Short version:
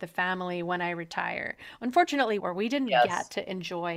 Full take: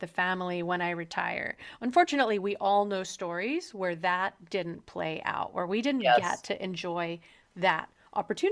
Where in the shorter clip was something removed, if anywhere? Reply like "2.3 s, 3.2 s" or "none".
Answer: 2.4 s